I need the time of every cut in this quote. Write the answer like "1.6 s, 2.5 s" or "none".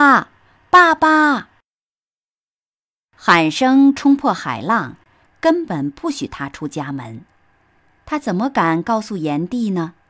5.3 s